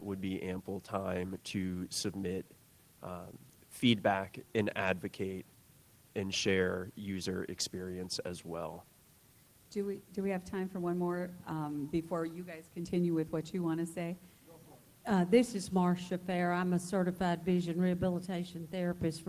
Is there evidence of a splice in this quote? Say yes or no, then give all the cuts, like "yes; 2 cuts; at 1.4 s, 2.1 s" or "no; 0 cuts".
yes; 1 cut; at 14.9 s